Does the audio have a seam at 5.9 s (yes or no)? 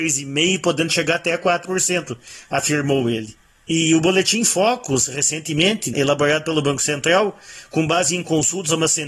yes